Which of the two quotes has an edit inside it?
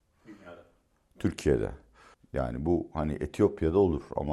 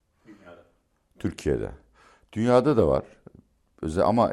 first; 1 cut; at 2.1 s

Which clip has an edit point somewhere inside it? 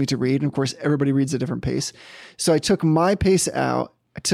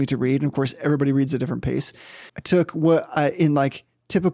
second; 1 cut; at 2.3 s

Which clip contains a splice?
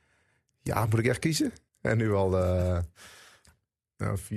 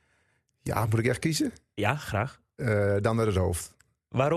first; 1 cut; at 1.7 s

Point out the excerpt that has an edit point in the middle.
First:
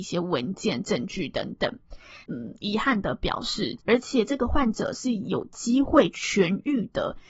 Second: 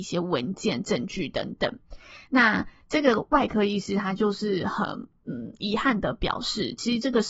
first; 2 cuts; at 2.2 s, 3.8 s

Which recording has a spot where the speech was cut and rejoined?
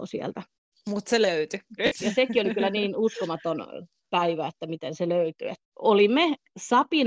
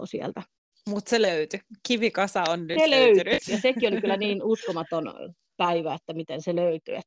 first; 2 cuts; at 1.8 s, 5.7 s

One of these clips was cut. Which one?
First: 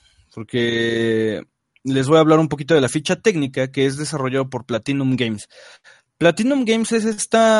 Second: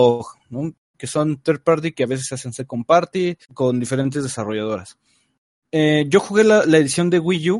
second; 2 cuts; at 0.9 s, 3.4 s

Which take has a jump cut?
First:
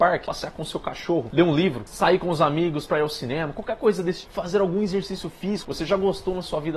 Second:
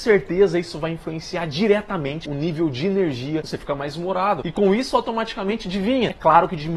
first; 2 cuts; at 4.2 s, 5.6 s

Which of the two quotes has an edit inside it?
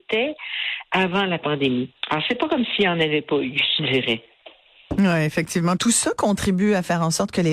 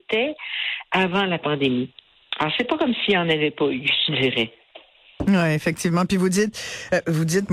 first; 2 cuts; at 2.0 s, 5.8 s

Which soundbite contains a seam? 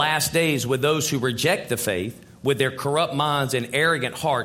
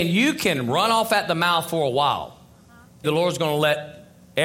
second; 1 cut; at 3.0 s

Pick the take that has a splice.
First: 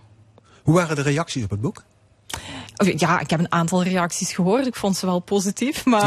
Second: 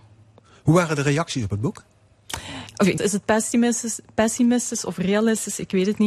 second; 1 cut; at 3.0 s

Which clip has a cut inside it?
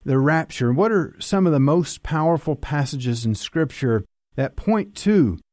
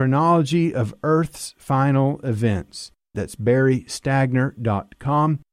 second; 1 cut; at 3.1 s

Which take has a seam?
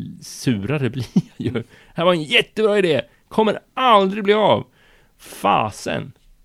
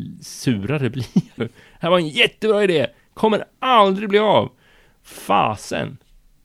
second; 1 cut; at 1.4 s

